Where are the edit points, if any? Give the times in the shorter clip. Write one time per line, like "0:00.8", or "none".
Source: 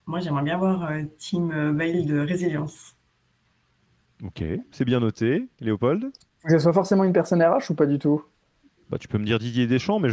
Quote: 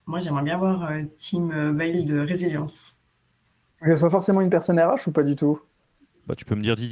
0:03.7